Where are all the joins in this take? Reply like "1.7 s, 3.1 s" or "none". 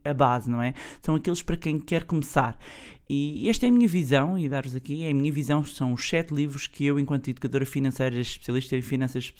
none